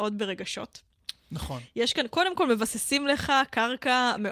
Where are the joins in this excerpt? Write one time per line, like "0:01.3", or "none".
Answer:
none